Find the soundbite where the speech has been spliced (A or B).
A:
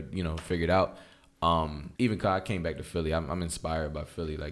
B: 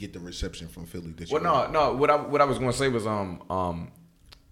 A